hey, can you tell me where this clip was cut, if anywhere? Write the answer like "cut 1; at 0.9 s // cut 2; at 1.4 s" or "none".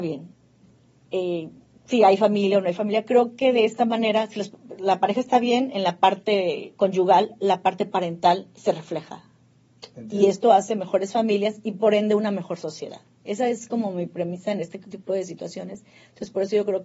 none